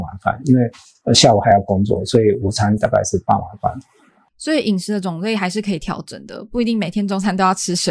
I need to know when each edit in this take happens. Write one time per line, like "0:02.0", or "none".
none